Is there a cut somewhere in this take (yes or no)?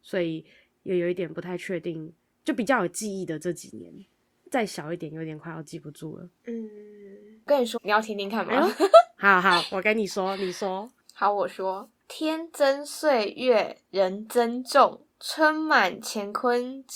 yes